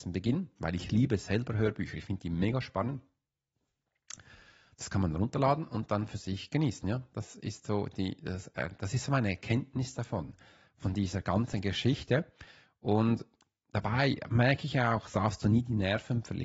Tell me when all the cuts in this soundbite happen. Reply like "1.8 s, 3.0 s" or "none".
none